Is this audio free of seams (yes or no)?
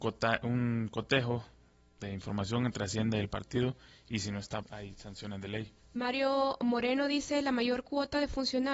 no